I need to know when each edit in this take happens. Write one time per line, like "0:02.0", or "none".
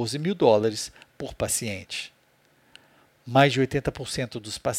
none